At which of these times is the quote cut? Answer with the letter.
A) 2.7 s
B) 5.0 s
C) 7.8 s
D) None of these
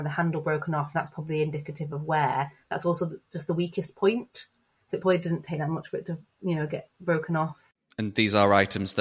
D